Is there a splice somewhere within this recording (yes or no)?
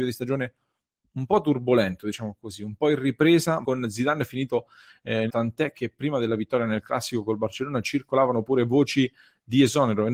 yes